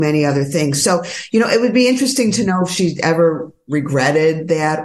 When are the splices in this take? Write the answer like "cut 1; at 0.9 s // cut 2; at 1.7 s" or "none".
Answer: none